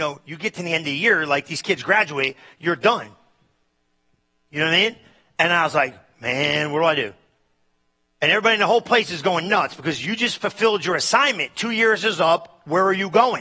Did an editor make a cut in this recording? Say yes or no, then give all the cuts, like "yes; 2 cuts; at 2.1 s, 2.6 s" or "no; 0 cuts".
no; 0 cuts